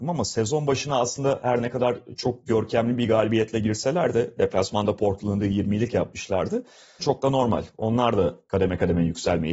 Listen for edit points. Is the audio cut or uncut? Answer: cut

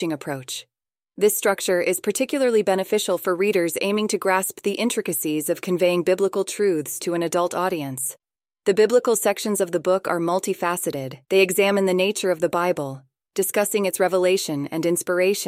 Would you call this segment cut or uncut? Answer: cut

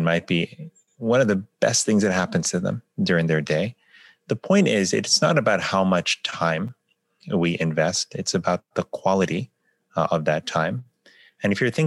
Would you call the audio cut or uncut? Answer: uncut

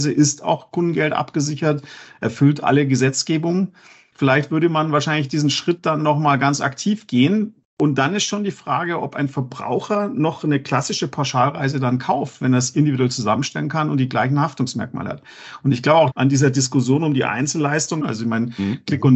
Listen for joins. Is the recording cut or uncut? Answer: cut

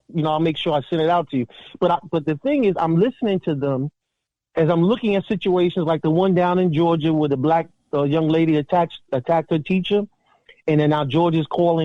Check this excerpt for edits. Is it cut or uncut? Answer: uncut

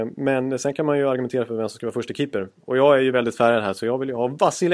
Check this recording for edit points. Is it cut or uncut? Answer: uncut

